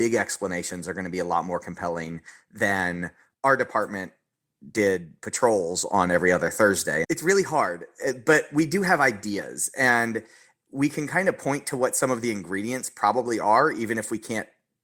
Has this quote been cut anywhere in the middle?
yes; 1 cut; at 7.0 s

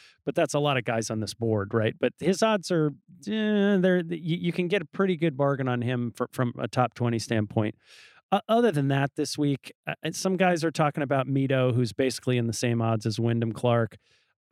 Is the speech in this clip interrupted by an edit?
no; 0 cuts

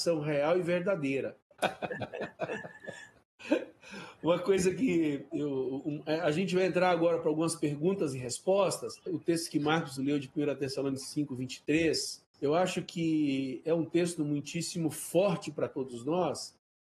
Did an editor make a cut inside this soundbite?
yes; 3 cuts; at 1.6 s, 9.1 s, 12.3 s

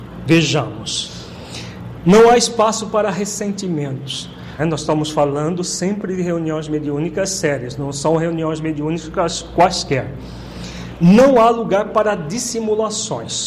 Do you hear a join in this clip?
yes; 2 cuts; at 2.0 s, 4.6 s

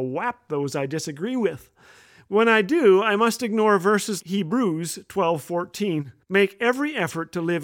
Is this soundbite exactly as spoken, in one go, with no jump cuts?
no; 2 cuts; at 4.2 s, 6.2 s

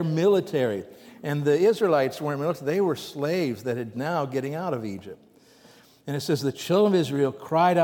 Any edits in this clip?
yes; 1 cut; at 3.9 s

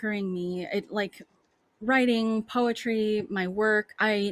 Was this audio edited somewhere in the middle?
no; 0 cuts

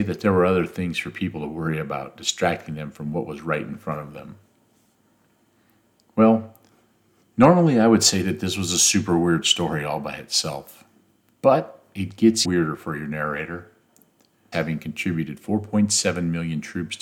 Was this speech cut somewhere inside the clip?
yes; 2 cuts; at 12.4 s, 14.5 s

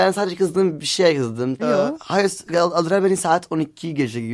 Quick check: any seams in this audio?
yes; 1 cut; at 1.6 s

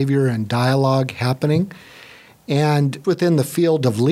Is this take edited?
yes; 1 cut; at 3.0 s

